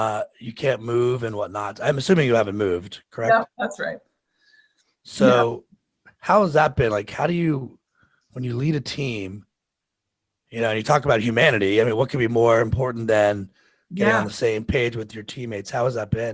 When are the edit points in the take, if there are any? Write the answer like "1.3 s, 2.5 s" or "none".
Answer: none